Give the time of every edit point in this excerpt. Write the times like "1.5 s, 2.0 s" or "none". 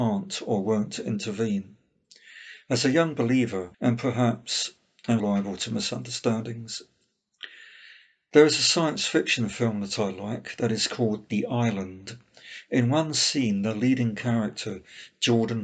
3.7 s, 5.2 s